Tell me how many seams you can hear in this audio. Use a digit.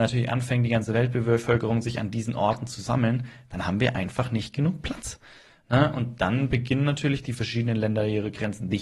0